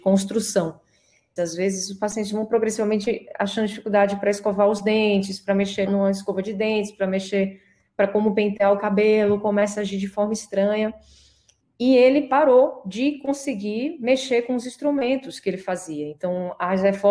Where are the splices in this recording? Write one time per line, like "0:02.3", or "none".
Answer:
0:01.4
0:05.9
0:11.6